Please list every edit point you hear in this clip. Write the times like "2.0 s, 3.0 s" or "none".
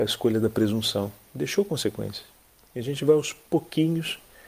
none

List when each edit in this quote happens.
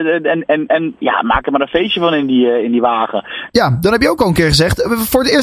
3.5 s

